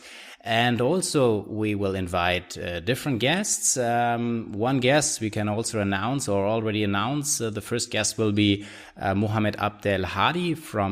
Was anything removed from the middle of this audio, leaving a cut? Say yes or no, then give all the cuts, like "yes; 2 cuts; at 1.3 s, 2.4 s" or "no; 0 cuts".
no; 0 cuts